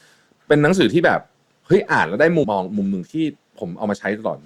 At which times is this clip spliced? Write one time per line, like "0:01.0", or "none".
0:02.4